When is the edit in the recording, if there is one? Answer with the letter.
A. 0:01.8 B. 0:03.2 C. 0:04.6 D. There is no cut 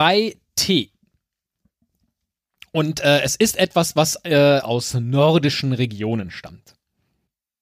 C